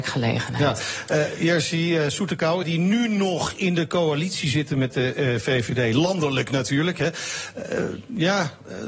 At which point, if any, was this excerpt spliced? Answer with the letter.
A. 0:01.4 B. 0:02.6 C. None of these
B